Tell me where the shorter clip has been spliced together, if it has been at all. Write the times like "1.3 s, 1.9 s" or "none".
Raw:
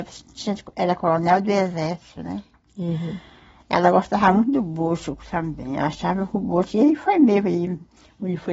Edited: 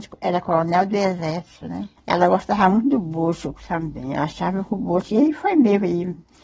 2.0 s

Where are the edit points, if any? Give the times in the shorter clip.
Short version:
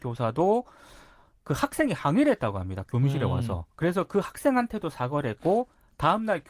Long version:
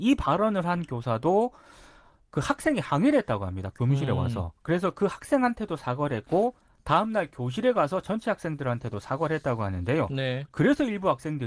none

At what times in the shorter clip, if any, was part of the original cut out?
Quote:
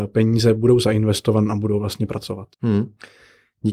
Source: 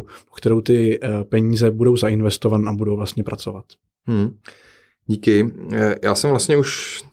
2.5 s

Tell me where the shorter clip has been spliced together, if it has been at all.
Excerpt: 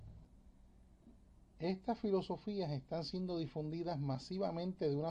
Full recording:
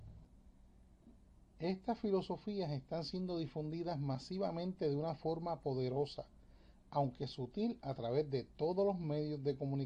none

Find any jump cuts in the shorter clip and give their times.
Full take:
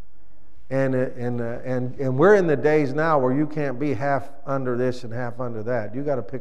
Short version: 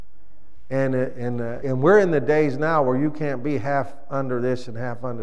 1.6 s

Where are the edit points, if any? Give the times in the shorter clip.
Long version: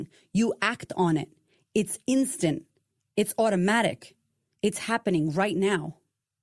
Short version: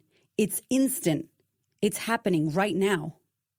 1.7 s

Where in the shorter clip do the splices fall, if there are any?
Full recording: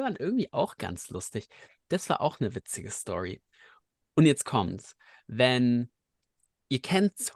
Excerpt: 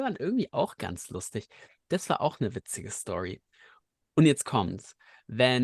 none

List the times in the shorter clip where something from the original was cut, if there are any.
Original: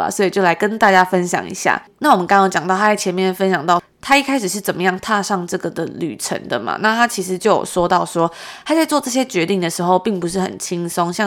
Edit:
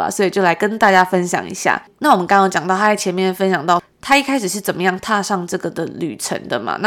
none

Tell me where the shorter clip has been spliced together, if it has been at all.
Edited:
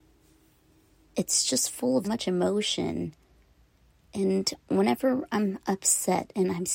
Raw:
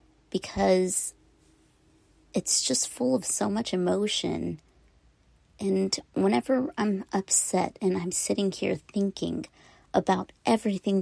2.0 s

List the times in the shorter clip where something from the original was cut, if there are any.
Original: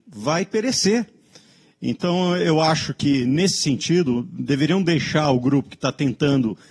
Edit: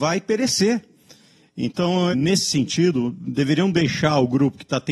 2.1 s

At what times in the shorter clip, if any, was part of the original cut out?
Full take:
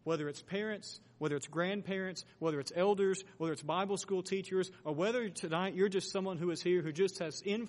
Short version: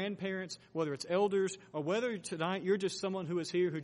1.7 s

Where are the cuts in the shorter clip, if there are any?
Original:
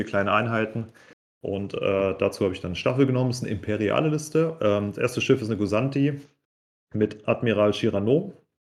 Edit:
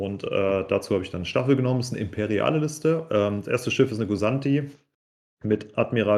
none

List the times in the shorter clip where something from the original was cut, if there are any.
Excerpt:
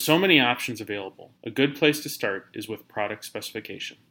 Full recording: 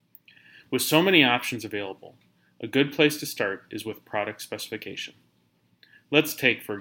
1.4 s

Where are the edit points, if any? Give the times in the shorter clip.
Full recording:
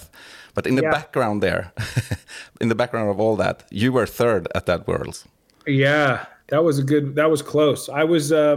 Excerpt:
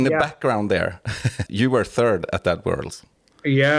1.5 s

